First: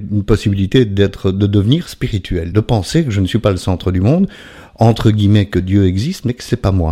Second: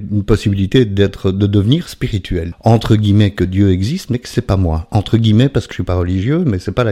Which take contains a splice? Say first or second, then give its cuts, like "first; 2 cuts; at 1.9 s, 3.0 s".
second; 2 cuts; at 2.5 s, 5.7 s